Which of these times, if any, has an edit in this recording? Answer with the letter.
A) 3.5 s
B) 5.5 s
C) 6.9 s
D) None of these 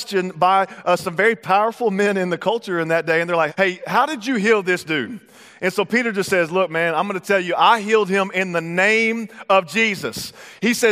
A